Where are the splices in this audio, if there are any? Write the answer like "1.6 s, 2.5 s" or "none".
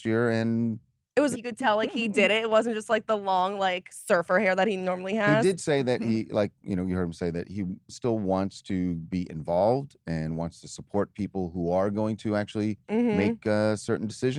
1.3 s